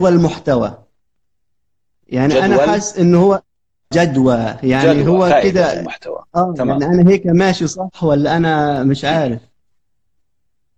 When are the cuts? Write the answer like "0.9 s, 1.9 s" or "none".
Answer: 3.9 s

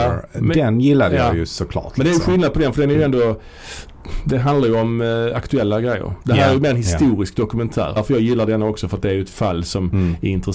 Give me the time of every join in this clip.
8.0 s

